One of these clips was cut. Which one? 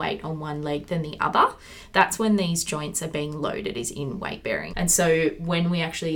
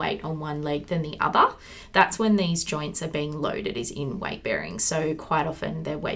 first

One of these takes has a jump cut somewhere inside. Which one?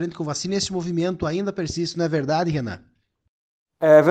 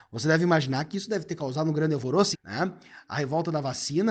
second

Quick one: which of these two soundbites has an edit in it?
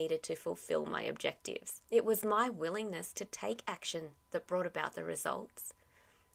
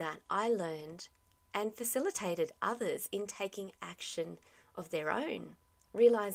first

